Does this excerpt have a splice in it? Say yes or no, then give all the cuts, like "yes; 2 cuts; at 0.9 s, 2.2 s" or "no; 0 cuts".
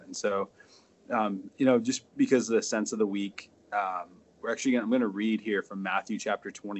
no; 0 cuts